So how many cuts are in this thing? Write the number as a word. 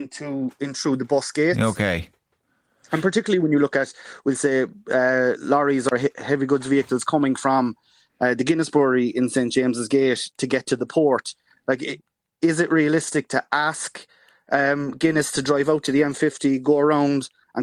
zero